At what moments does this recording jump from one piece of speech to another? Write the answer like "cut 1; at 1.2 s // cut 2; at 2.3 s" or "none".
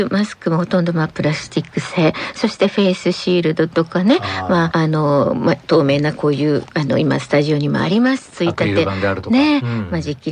cut 1; at 4.7 s